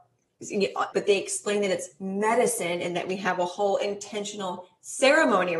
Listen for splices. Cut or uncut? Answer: cut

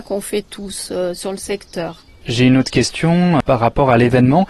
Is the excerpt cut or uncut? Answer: uncut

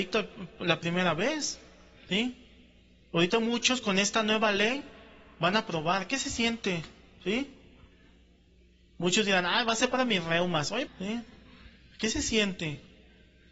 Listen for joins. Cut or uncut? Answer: cut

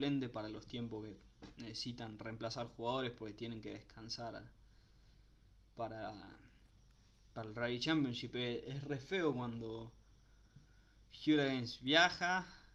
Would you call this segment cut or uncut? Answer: uncut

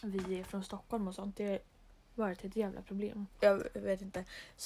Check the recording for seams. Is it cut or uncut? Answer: cut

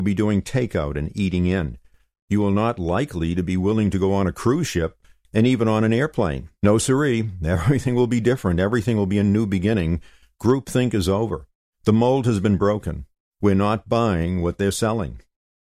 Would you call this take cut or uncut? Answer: cut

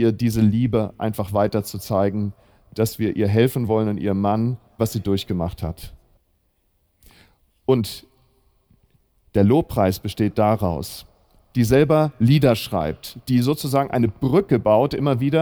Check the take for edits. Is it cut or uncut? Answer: cut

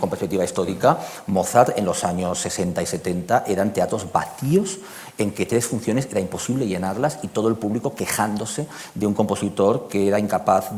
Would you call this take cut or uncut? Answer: uncut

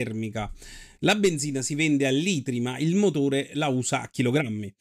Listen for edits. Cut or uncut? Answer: uncut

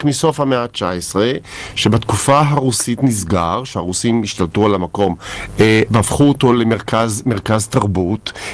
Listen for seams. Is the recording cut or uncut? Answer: uncut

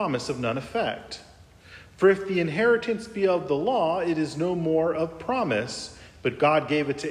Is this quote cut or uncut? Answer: uncut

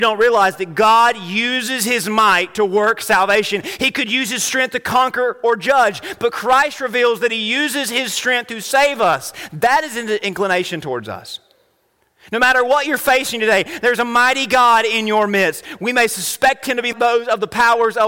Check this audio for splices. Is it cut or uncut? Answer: cut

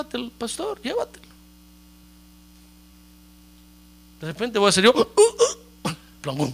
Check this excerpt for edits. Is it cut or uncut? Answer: uncut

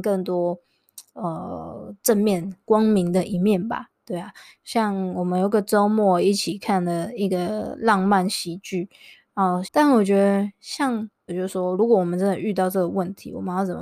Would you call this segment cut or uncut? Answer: cut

